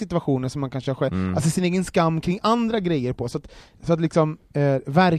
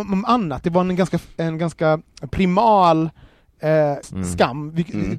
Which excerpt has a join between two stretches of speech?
second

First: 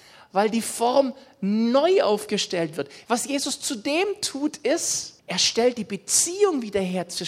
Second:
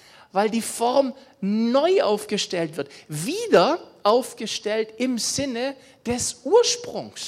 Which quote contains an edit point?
first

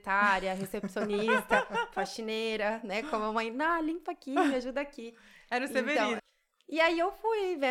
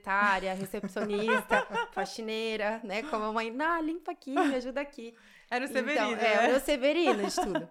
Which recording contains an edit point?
first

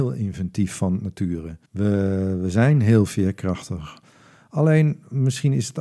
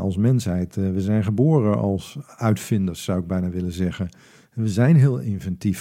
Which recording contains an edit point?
first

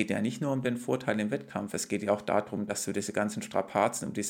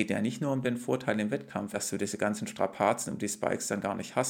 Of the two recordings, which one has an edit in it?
second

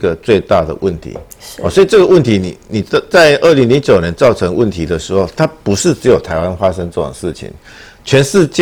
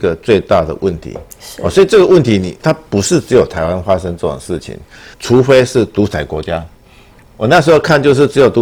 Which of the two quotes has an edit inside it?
second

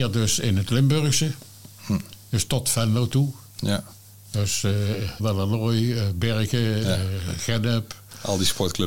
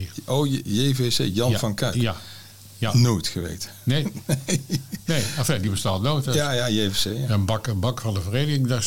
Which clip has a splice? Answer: first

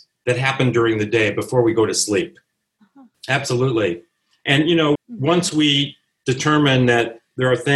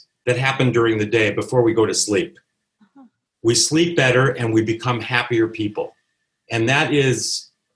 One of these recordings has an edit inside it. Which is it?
first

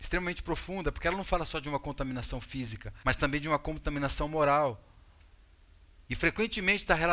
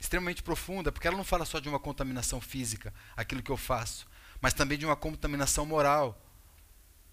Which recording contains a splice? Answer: first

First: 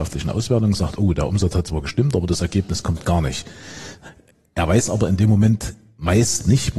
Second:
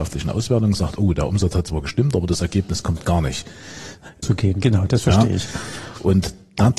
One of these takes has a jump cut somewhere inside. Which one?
second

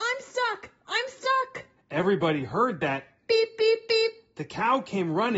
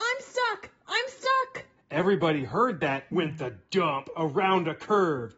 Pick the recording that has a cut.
second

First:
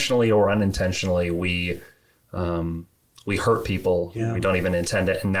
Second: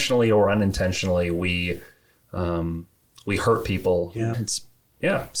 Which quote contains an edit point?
second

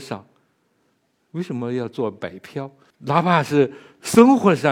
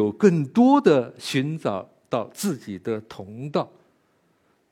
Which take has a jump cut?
first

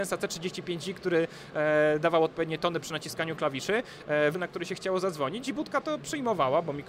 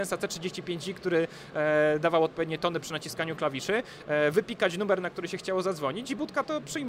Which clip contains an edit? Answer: first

